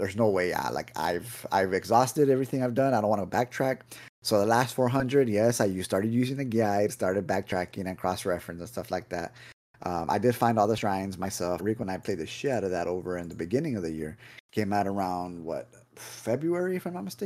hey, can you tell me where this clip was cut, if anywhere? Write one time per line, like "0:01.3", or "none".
0:11.6